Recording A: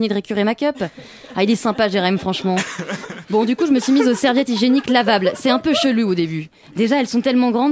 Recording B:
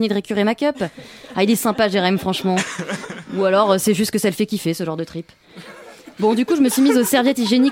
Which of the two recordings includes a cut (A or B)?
A